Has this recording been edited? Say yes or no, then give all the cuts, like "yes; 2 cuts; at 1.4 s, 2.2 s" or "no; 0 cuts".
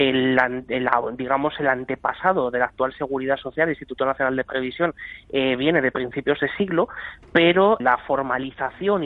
yes; 1 cut; at 7.8 s